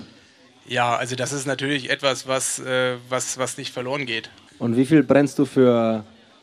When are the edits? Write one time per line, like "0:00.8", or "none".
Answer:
0:04.5